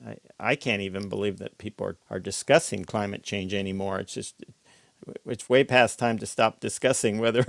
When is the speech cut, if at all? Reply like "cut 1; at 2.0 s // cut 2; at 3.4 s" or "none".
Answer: cut 1; at 2.0 s

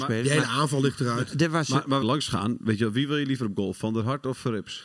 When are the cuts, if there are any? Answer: cut 1; at 2.0 s

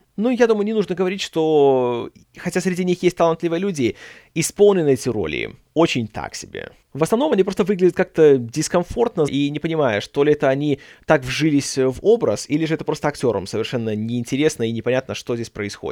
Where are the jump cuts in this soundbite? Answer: cut 1; at 9.3 s

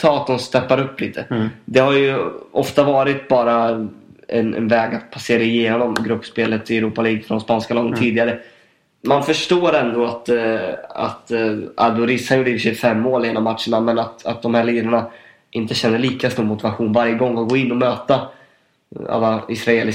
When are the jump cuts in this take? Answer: none

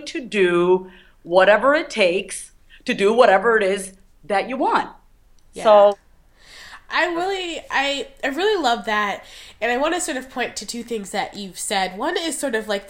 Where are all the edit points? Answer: none

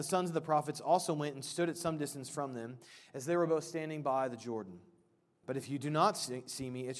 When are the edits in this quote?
cut 1; at 5.4 s

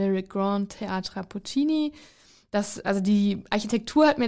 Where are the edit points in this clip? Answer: none

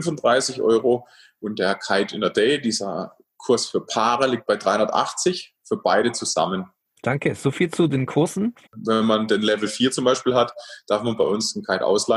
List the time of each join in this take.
cut 1; at 6.8 s // cut 2; at 8.7 s

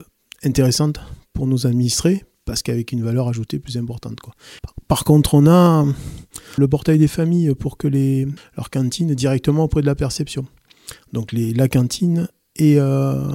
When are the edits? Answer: cut 1; at 4.6 s // cut 2; at 6.6 s // cut 3; at 8.4 s

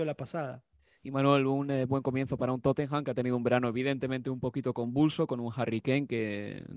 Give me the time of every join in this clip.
none

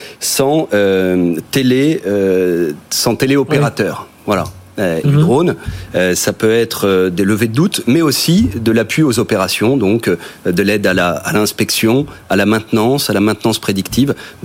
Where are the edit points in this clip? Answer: cut 1; at 5.0 s

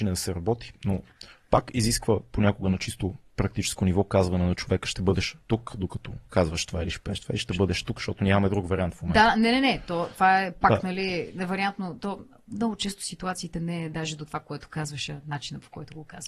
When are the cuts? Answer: none

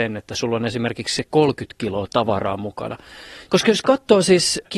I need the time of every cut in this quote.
cut 1; at 3.5 s

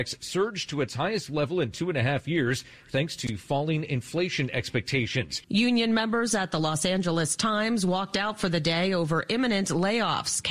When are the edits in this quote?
cut 1; at 5.4 s

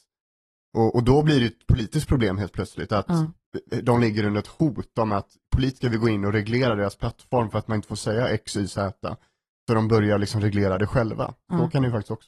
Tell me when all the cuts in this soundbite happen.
none

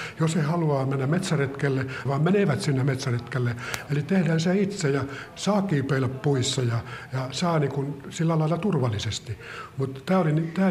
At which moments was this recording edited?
cut 1; at 2.1 s // cut 2; at 3.9 s

